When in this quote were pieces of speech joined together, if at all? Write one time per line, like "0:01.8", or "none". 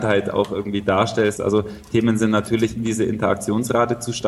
0:01.4
0:02.8